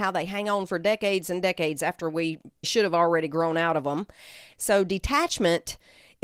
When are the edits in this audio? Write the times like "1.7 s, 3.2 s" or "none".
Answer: 2.6 s, 4.5 s